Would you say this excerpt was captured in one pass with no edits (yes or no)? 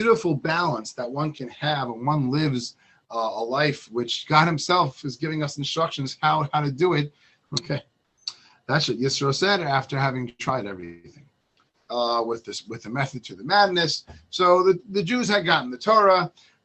no